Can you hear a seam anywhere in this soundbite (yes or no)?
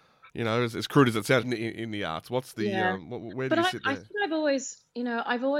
yes